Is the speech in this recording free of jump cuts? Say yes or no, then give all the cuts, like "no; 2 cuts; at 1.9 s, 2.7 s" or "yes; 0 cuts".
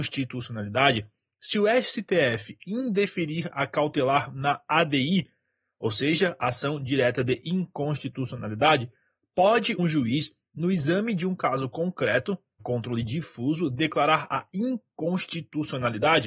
no; 2 cuts; at 9.8 s, 12.6 s